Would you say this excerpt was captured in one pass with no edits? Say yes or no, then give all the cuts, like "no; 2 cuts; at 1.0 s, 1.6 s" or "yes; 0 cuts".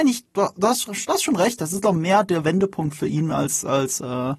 yes; 0 cuts